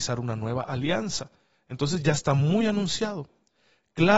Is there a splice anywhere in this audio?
no; 0 cuts

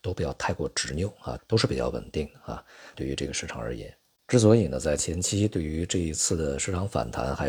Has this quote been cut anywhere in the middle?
yes; 2 cuts; at 1.4 s, 2.9 s

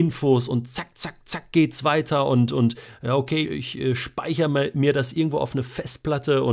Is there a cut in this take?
yes; 1 cut; at 3.4 s

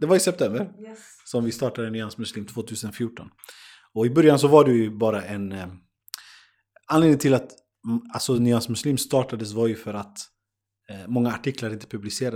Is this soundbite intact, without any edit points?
yes; 0 cuts

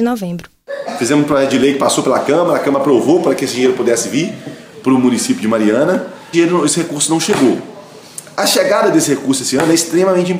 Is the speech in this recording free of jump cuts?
no; 1 cut; at 6.3 s

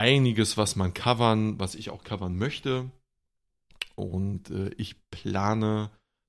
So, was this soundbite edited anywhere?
no; 0 cuts

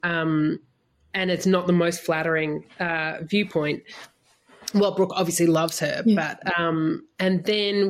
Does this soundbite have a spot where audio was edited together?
no; 0 cuts

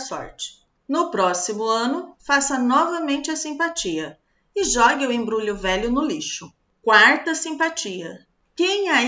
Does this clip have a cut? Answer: no; 0 cuts

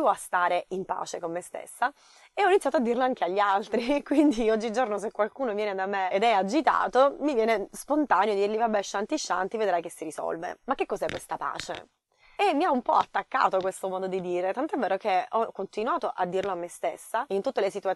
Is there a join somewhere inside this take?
yes; 1 cut; at 12.4 s

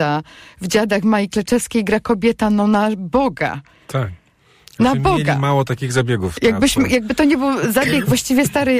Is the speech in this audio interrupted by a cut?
no; 0 cuts

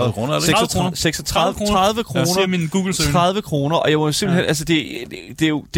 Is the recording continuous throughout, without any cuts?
yes; 0 cuts

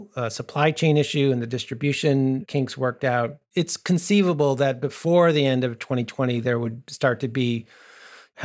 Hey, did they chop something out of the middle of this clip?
no; 0 cuts

